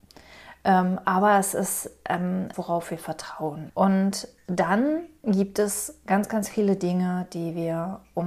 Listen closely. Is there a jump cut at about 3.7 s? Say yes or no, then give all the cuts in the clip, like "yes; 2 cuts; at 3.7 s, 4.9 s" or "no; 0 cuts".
yes; 2 cuts; at 2.5 s, 3.7 s